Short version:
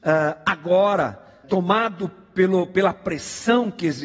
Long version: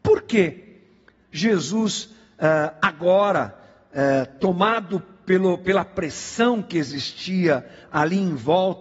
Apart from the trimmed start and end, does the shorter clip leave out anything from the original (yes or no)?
yes